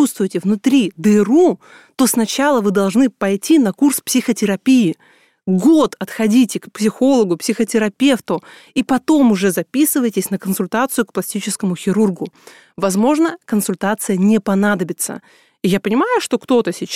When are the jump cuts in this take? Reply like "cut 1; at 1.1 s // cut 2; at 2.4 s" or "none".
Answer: none